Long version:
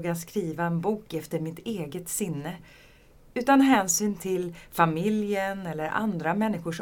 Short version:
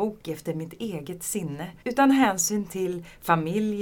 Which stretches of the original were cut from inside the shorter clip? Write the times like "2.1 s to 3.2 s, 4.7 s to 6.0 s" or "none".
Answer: 2.7 s to 3.3 s